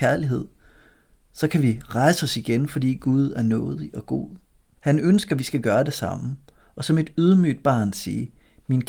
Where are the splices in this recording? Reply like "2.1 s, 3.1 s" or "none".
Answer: 4.8 s